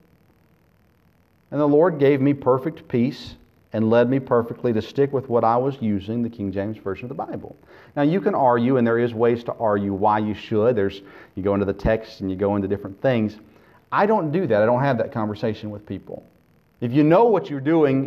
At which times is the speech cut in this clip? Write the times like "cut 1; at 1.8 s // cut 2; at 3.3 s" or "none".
cut 1; at 16.7 s